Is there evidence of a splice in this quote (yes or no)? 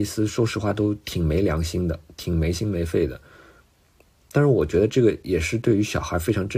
no